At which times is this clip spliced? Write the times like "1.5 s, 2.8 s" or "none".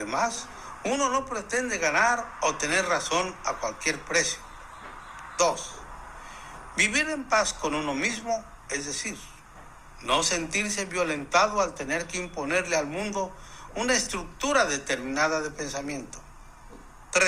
none